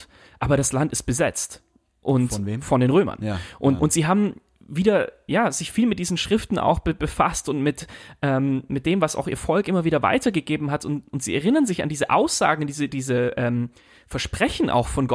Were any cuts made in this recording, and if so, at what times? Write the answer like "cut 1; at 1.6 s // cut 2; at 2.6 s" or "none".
cut 1; at 3.8 s // cut 2; at 12.9 s